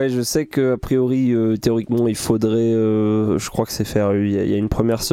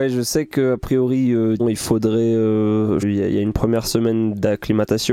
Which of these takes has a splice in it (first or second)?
second